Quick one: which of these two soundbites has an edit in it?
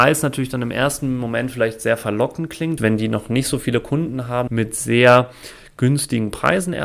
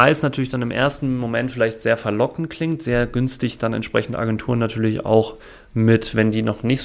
first; 2 cuts; at 2.8 s, 4.5 s

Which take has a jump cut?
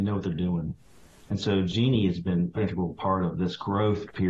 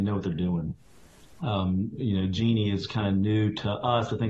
first; 2 cuts; at 1.2 s, 2.6 s

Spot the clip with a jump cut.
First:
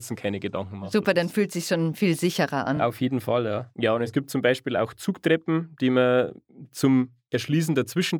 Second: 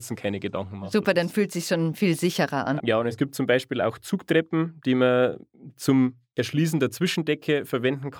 second; 1 cut; at 2.8 s

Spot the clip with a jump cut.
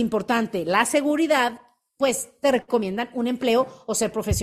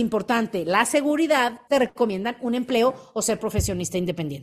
second; 1 cut; at 1.7 s

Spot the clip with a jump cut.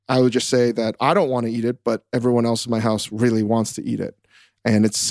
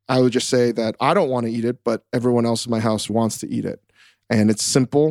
second; 1 cut; at 3.1 s

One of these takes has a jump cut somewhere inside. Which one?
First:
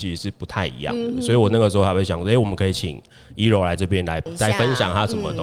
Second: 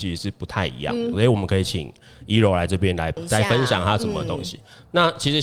second; 1 cut; at 1.1 s

